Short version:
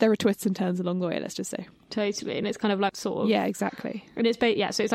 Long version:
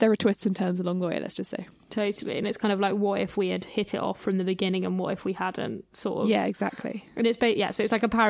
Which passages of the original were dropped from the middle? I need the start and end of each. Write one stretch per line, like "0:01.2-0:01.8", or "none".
0:02.9-0:05.9